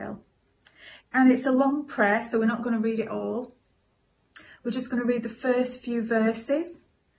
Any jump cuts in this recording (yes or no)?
yes